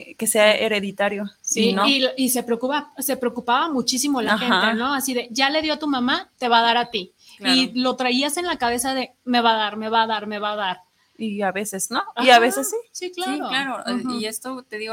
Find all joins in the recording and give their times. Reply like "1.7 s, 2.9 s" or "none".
none